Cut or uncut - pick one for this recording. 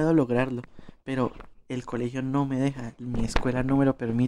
uncut